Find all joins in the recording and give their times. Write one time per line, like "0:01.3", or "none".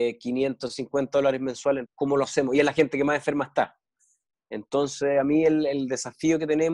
0:01.9